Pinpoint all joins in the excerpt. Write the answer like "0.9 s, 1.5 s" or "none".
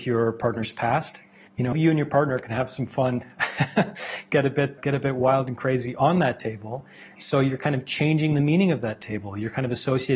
1.7 s, 4.8 s

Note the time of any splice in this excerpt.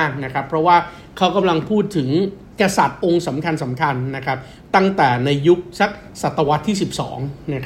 2.5 s

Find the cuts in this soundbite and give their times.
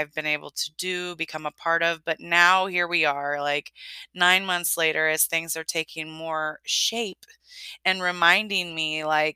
none

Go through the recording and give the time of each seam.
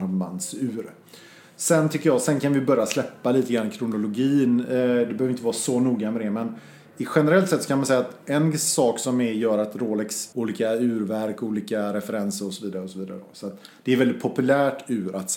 10.3 s

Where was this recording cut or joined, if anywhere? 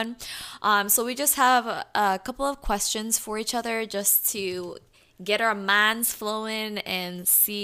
none

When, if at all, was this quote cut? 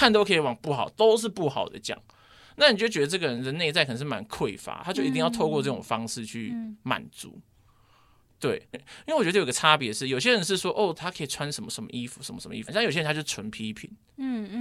8.7 s, 11.0 s, 12.7 s

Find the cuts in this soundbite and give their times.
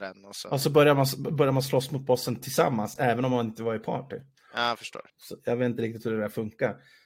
5.1 s

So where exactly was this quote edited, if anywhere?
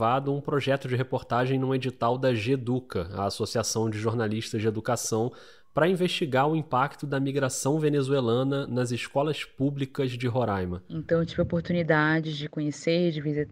none

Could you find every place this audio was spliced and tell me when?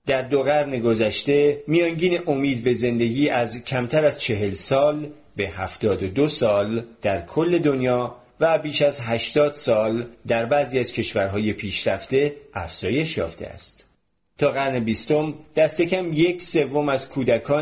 14.2 s

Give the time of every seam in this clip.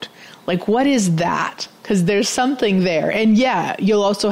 3.1 s

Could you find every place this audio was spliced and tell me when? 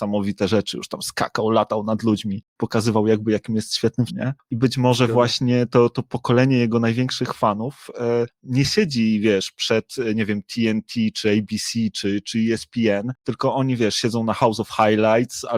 4.1 s

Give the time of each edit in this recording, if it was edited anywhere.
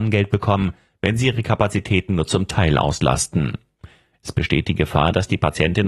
none

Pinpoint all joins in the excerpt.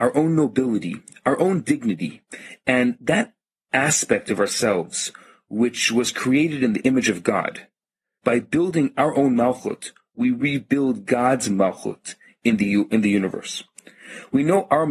8.2 s

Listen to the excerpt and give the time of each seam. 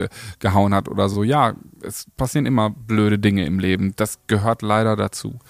none

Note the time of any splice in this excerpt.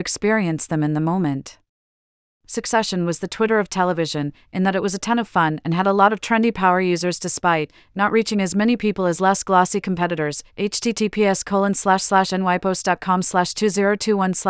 none

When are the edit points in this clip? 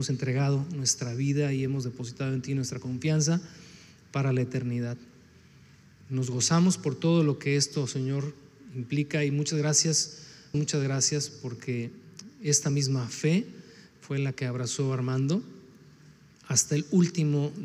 10.5 s

